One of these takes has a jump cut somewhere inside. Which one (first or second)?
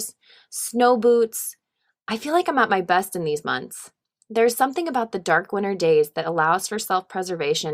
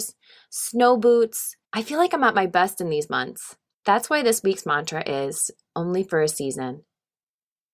second